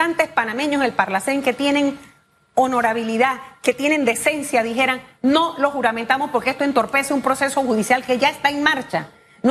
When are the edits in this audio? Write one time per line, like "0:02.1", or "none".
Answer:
none